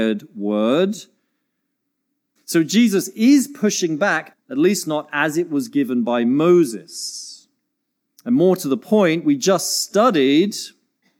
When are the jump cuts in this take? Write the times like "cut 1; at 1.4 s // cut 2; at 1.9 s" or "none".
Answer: cut 1; at 2.4 s // cut 2; at 4.3 s // cut 3; at 8.2 s